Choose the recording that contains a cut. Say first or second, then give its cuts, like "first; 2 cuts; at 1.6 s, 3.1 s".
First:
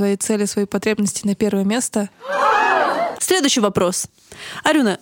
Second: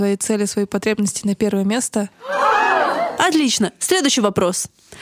first; 1 cut; at 3.1 s